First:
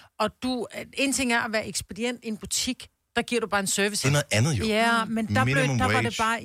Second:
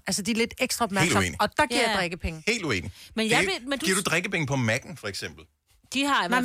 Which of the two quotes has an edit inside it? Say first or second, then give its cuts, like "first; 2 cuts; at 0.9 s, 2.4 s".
first; 1 cut; at 4.0 s